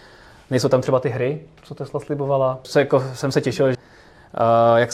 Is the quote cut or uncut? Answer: cut